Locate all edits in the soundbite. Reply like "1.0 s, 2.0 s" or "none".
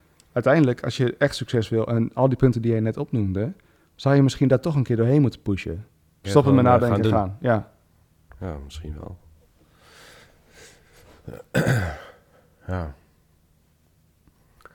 6.2 s